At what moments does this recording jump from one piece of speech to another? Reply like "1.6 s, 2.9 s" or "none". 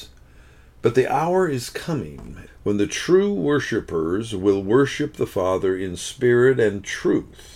2.5 s